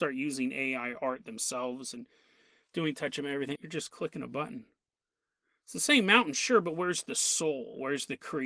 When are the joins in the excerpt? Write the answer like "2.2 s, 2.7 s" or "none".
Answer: 3.6 s